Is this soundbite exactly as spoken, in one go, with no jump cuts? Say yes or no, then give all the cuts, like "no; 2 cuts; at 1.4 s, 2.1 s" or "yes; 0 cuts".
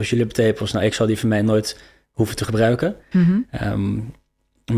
no; 1 cut; at 3.1 s